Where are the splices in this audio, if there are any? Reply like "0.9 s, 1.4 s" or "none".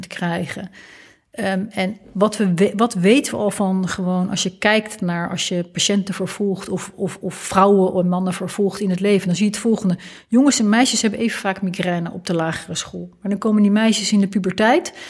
none